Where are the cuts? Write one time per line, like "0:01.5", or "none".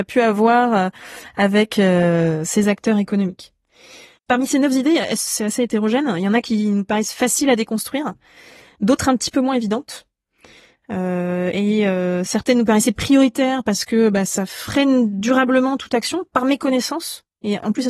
0:04.2